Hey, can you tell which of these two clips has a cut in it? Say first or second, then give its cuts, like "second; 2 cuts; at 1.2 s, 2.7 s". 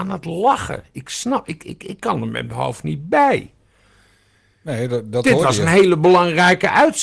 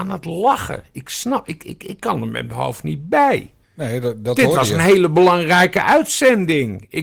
second; 1 cut; at 3.6 s